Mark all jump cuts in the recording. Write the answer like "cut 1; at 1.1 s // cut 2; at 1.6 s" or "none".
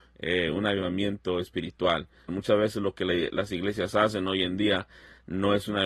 cut 1; at 2.3 s